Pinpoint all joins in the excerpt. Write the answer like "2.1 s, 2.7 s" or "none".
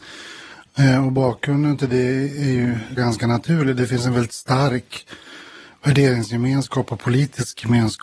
3.0 s